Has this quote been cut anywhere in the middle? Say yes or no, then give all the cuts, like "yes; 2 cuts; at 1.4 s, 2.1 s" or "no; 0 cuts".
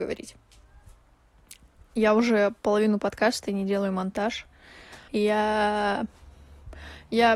yes; 1 cut; at 5.1 s